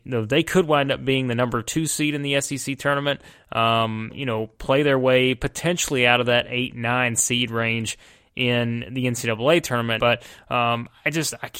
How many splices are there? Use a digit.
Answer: 2